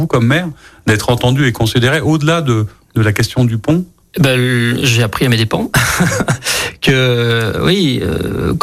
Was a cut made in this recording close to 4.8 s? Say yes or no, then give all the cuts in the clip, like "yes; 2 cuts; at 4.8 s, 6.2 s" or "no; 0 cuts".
no; 0 cuts